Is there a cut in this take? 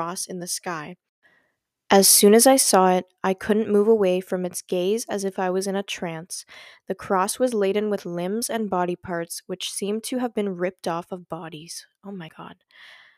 no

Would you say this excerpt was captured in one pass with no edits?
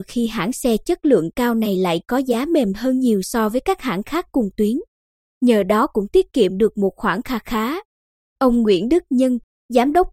yes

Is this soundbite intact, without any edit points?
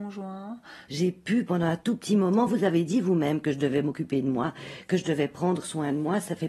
yes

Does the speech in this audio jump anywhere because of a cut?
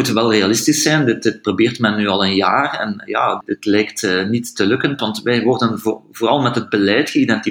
yes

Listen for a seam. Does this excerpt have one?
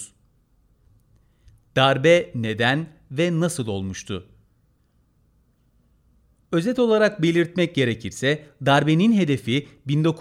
no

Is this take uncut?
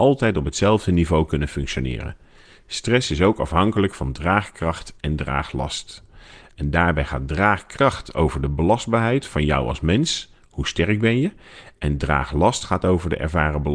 yes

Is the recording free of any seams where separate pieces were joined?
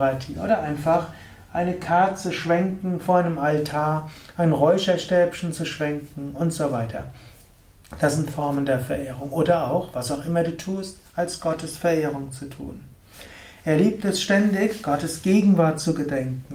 yes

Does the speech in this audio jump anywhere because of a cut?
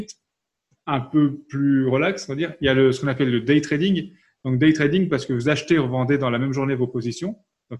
no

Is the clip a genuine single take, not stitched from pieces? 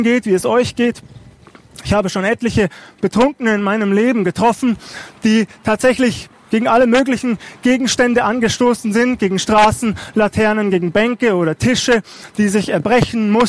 yes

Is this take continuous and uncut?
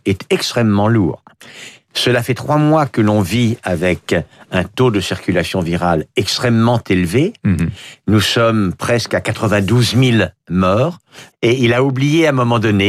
no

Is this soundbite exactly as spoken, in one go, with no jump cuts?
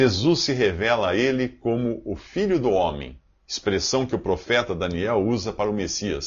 yes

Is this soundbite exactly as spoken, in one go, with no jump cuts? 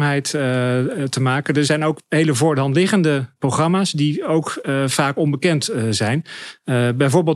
yes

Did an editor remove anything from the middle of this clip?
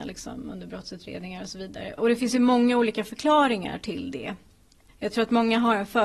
yes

